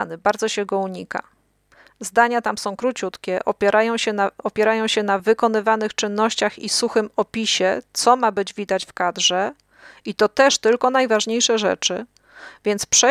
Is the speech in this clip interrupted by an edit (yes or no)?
no